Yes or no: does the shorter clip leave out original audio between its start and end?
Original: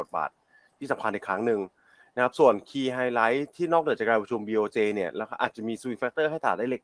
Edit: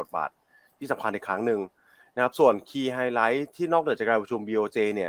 no